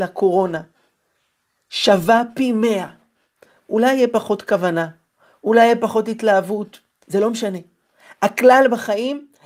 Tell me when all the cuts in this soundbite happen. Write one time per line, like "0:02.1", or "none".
0:07.0